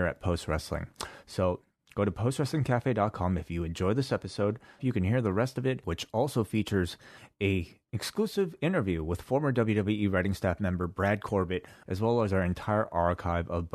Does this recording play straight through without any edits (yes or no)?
no